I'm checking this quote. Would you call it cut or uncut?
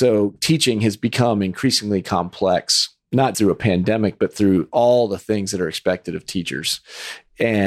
cut